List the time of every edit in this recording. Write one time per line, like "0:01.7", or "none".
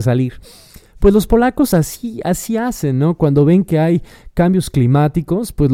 none